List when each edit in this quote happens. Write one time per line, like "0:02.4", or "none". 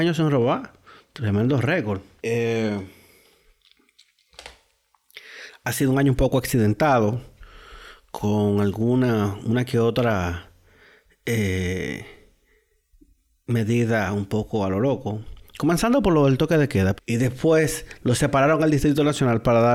0:02.2
0:17.0